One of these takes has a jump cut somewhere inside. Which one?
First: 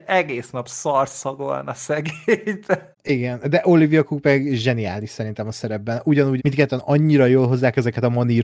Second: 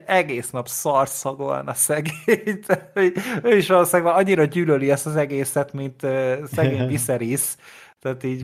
first; 2 cuts; at 2.9 s, 6.4 s

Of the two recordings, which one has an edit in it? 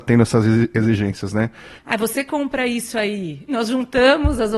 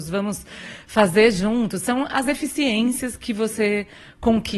first; 2 cuts; at 1.8 s, 3.5 s

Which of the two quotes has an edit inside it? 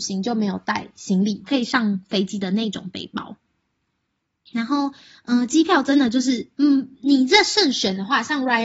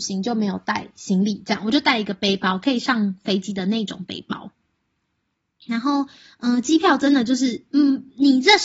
first; 1 cut; at 1.4 s

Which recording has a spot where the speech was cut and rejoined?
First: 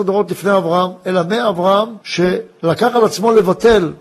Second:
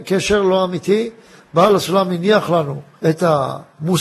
first; 1 cut; at 2.0 s

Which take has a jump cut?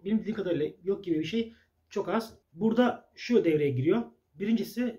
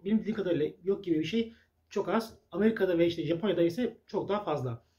first; 1 cut; at 2.4 s

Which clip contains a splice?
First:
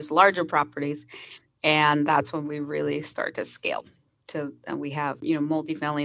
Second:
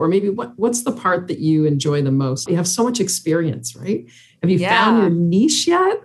second; 1 cut; at 2.5 s

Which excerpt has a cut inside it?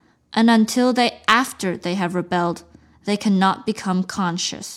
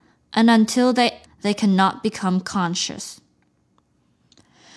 second; 1 cut; at 1.3 s

